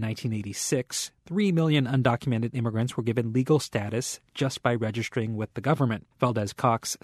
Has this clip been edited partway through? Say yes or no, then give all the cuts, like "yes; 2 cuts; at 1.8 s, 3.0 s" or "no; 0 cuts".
yes; 1 cut; at 6.1 s